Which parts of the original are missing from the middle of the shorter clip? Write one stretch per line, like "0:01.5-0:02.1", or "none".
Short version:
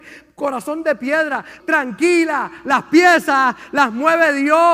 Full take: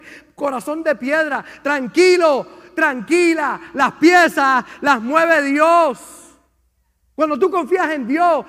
0:01.6-0:02.7